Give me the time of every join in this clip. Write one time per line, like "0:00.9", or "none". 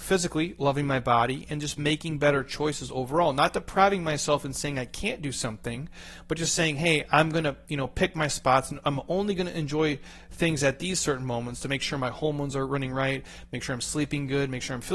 none

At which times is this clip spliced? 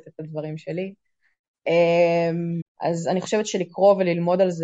0:02.6

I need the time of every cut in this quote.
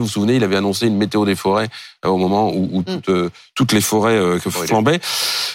none

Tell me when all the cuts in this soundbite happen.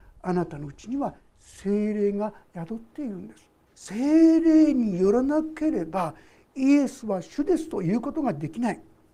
0:03.7

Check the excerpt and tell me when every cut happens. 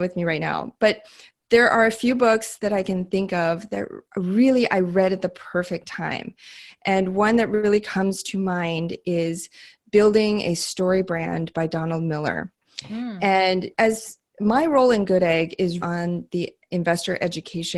0:13.7
0:15.8

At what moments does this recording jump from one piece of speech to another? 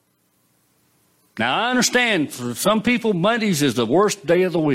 none

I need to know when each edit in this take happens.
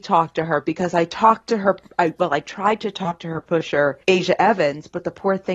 0:04.0

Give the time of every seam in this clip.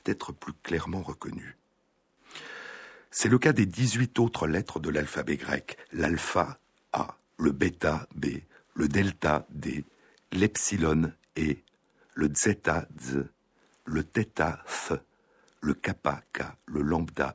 0:07.3

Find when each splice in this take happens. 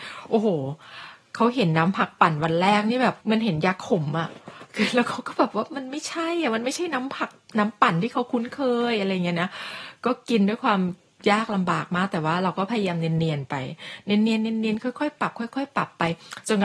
0:03.2

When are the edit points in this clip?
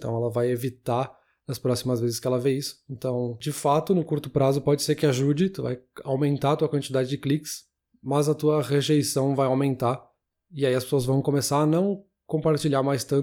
none

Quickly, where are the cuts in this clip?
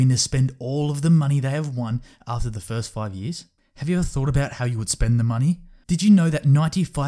0:03.6
0:05.8

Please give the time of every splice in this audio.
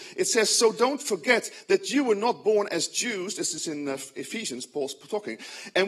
none

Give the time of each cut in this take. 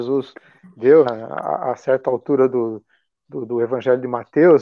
0:01.1

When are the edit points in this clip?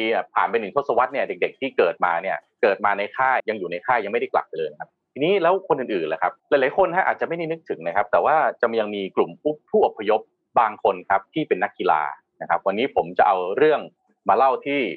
0:03.4
0:06.4

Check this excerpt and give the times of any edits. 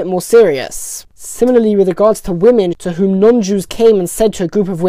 0:01.1
0:02.7

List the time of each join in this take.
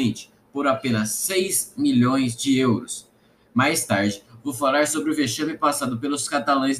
none

